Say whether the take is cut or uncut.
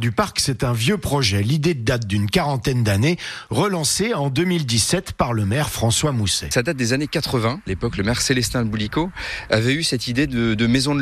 uncut